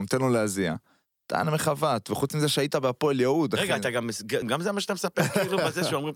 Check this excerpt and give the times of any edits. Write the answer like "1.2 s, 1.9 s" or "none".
4.4 s